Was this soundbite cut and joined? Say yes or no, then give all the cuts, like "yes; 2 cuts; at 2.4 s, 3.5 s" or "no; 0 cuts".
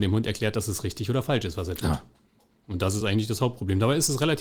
no; 0 cuts